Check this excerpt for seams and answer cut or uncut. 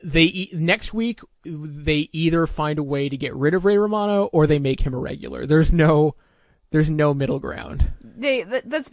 uncut